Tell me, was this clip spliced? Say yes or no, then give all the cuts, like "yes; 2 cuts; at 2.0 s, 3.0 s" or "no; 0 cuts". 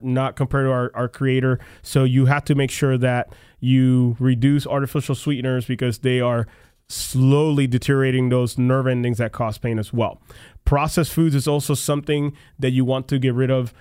no; 0 cuts